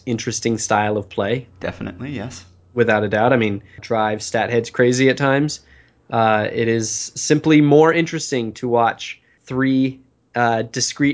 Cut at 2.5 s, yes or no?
no